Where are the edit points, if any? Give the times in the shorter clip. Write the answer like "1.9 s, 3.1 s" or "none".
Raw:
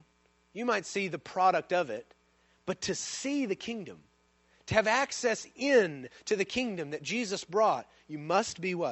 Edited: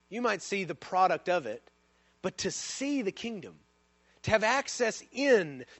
none